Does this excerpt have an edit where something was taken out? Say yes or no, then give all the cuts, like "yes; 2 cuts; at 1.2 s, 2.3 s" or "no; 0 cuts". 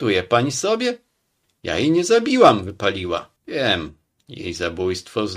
yes; 1 cut; at 3.4 s